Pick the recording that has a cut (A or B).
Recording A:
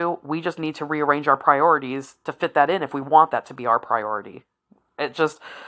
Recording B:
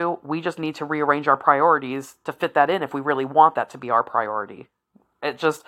A